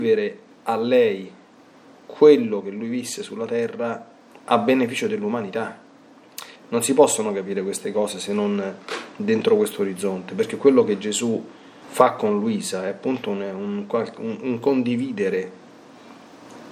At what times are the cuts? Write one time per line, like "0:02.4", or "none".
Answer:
0:06.6
0:11.8